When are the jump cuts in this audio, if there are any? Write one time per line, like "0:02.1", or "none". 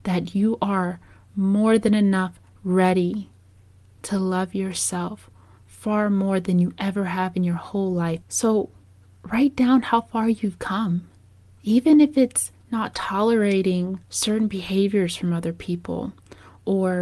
0:08.2
0:14.0